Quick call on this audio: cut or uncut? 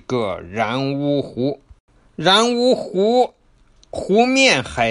uncut